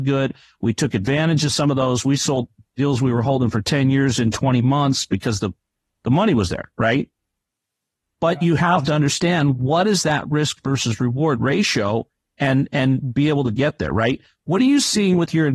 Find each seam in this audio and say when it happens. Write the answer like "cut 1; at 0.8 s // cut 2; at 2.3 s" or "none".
none